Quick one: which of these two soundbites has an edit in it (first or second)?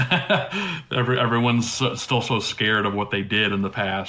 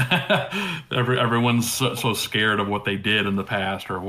second